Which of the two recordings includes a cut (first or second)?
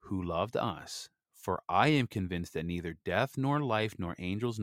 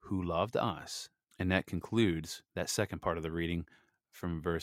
second